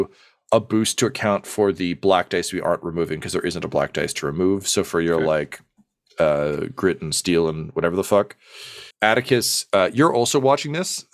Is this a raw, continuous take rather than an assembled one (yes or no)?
no